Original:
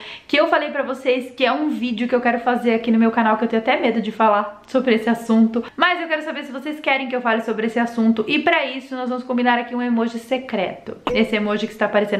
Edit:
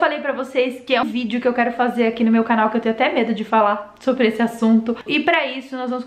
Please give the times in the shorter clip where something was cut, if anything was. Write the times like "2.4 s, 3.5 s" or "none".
1.0 s, 5.1 s